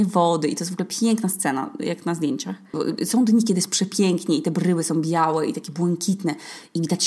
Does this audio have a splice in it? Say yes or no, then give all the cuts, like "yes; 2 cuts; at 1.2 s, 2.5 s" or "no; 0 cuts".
yes; 1 cut; at 2.7 s